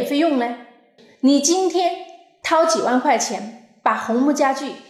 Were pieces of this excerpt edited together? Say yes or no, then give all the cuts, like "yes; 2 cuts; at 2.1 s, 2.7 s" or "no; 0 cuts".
yes; 1 cut; at 1.0 s